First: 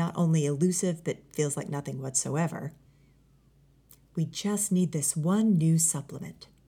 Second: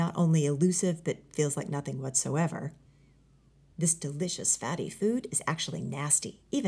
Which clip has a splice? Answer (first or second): second